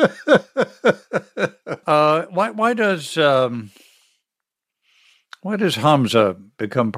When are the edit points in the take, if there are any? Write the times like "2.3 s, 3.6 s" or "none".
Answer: 1.8 s